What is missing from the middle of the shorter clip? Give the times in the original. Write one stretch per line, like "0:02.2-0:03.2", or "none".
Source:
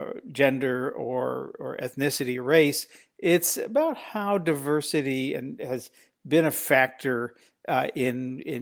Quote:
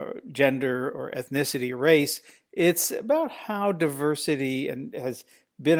0:00.9-0:01.6